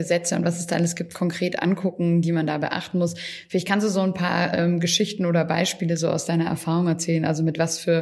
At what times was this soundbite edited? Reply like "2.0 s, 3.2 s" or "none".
none

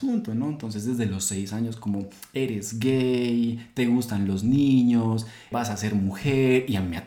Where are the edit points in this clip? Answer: none

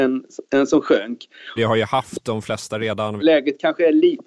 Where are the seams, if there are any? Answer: 1.6 s, 3.2 s

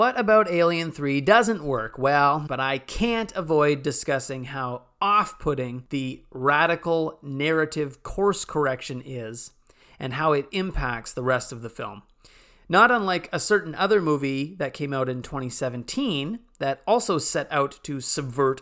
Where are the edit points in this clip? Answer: 2.5 s

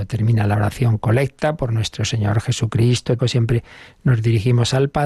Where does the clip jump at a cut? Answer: 3.2 s

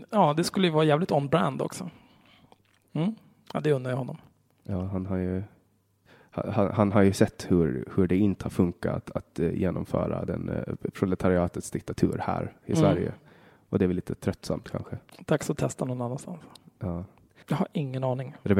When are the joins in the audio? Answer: 2.9 s, 17.4 s

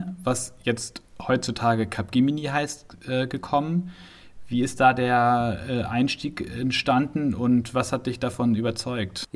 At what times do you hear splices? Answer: none

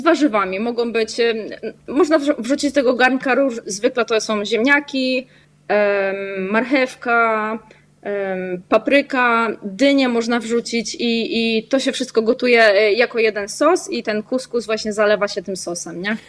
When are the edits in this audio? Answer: 3.6 s

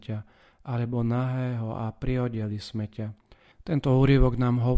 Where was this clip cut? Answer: 3.5 s

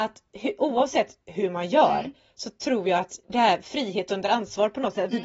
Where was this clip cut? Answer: 3.2 s

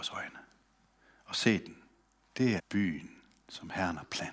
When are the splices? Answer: 2.6 s

